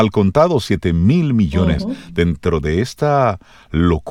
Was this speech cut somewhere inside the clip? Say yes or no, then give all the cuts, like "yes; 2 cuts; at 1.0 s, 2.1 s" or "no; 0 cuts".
yes; 1 cut; at 1.8 s